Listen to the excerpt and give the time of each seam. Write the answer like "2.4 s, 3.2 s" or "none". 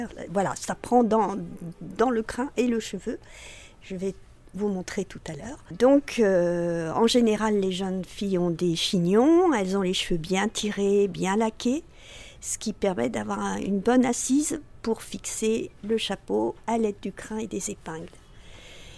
none